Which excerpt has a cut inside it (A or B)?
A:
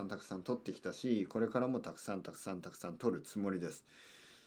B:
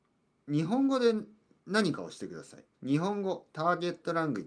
B